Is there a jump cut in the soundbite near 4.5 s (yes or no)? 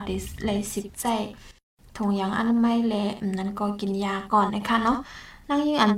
yes